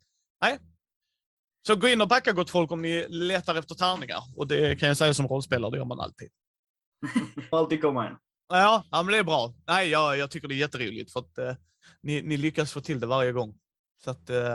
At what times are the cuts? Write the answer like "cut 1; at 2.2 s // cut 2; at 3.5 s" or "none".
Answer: cut 1; at 7.5 s